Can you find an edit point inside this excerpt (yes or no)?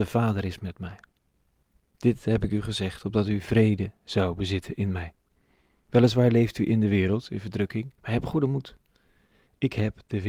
yes